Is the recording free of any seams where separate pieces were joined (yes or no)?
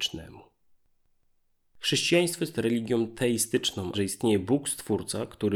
no